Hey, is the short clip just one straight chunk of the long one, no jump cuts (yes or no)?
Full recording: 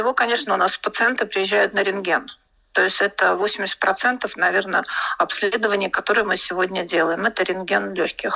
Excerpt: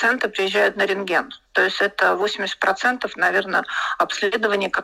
no